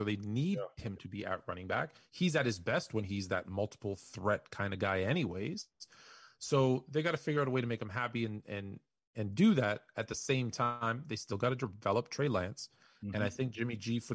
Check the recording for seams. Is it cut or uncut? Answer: uncut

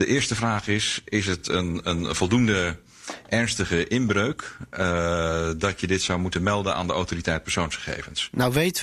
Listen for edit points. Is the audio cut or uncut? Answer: uncut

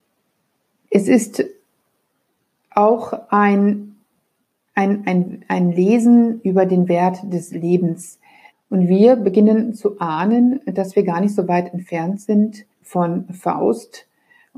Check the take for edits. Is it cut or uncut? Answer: cut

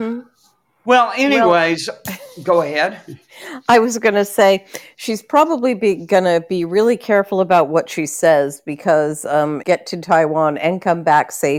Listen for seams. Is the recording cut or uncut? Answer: cut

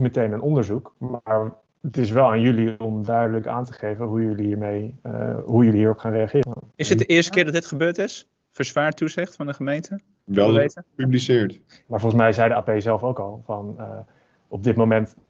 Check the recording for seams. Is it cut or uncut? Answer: cut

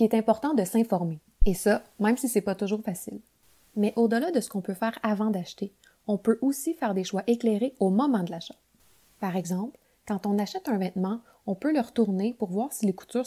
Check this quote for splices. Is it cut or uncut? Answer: uncut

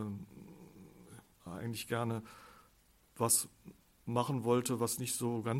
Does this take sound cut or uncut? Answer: uncut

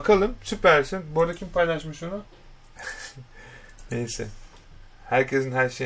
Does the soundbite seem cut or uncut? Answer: cut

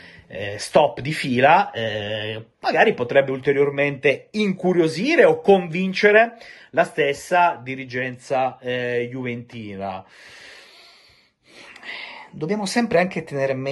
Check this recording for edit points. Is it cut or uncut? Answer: uncut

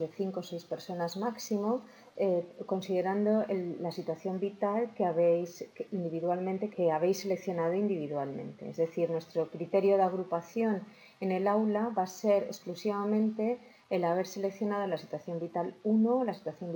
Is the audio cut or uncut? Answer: cut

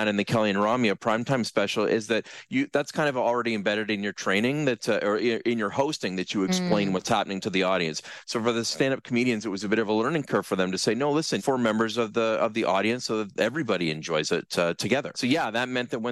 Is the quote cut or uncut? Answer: cut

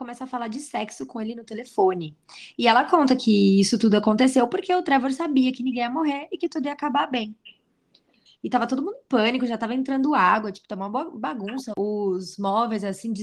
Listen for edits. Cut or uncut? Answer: cut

